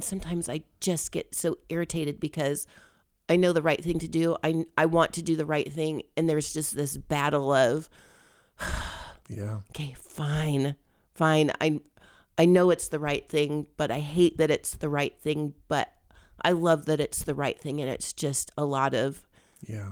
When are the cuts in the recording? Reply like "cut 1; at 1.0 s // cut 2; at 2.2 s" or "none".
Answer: none